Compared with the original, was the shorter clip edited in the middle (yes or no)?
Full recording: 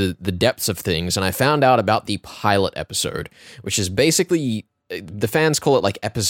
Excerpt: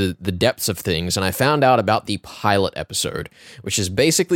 no